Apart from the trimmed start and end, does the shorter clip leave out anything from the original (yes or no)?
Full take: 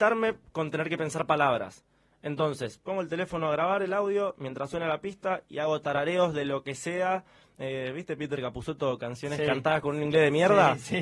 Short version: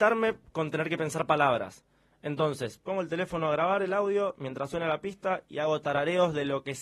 no